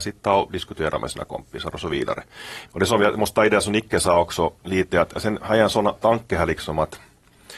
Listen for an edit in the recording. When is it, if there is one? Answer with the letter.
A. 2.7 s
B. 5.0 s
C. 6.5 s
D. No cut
A